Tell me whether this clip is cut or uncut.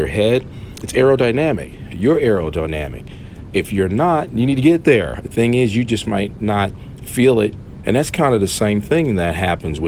cut